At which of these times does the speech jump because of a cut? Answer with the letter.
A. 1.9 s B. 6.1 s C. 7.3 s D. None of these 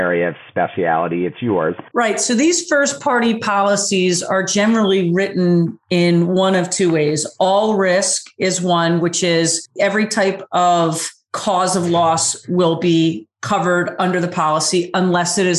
A